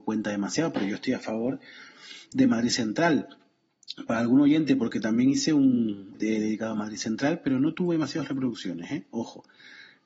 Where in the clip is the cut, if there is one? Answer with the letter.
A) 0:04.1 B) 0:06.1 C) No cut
B